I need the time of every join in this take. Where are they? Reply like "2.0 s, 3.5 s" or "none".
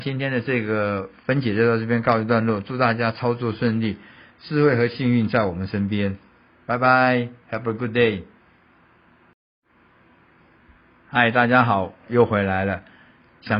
12.1 s